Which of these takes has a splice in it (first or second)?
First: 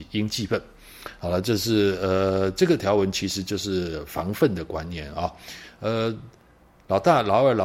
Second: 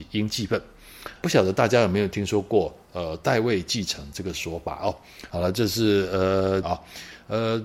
second